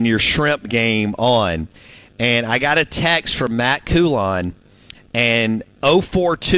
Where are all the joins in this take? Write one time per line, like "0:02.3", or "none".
none